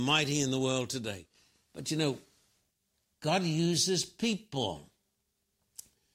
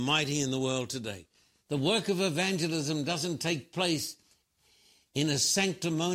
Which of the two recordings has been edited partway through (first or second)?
second